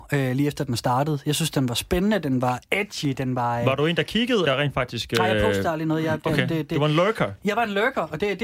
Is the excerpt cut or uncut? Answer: cut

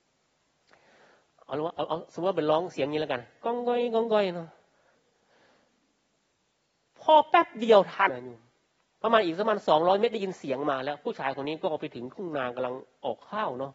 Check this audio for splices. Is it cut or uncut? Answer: cut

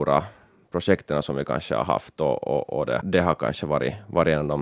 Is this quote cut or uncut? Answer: cut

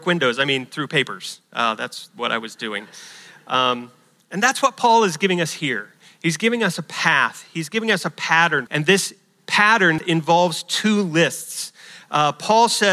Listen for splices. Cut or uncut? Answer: cut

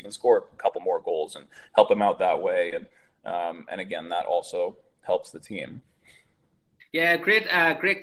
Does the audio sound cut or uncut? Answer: uncut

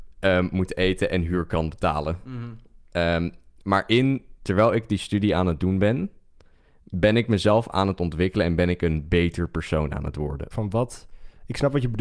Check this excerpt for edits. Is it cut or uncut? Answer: cut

